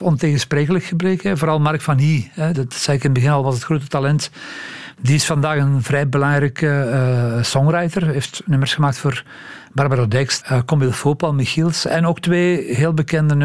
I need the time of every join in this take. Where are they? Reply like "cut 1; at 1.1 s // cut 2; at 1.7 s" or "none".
cut 1; at 2.5 s // cut 2; at 10.4 s